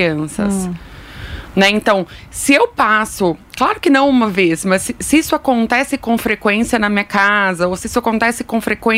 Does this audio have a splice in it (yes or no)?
no